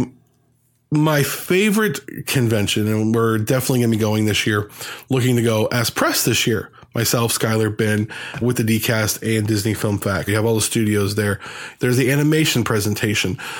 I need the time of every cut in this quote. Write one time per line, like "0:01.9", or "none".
0:08.4
0:10.3
0:11.8